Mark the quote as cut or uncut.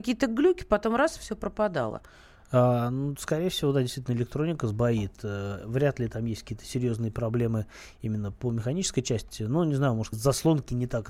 cut